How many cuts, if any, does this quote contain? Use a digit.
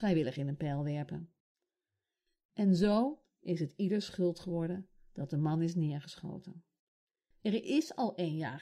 1